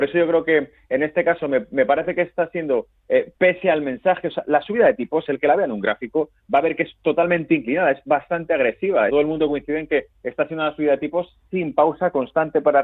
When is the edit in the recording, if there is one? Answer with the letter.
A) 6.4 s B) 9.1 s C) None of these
B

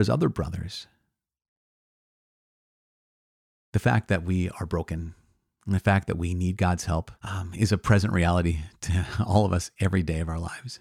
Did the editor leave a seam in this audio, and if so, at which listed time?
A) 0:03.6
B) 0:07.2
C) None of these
B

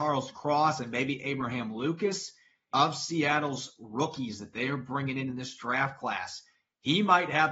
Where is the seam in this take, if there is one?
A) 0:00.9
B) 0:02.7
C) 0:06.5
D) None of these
B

